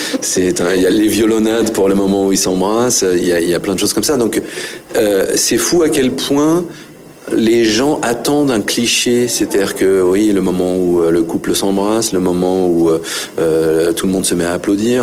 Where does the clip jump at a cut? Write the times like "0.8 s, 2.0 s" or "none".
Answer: 0.9 s